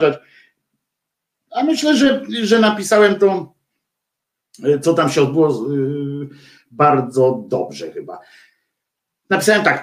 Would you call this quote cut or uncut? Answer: uncut